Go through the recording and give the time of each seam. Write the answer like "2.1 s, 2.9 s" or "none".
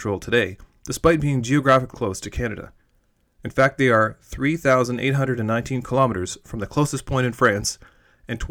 1.9 s